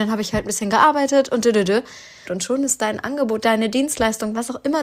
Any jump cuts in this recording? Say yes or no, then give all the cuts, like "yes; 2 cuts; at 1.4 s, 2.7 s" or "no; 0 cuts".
yes; 2 cuts; at 2.2 s, 3.4 s